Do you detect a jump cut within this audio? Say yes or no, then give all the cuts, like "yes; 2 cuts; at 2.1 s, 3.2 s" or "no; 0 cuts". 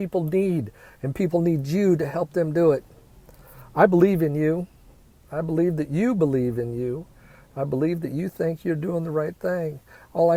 no; 0 cuts